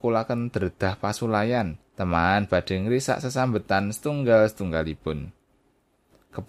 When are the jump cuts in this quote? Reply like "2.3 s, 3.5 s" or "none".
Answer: 1.9 s